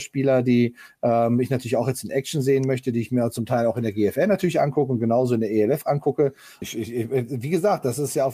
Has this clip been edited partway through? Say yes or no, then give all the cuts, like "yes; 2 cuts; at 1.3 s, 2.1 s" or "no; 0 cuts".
yes; 1 cut; at 6.6 s